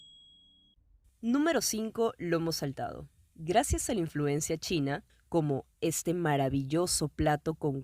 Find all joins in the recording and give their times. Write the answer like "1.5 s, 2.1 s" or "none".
5.1 s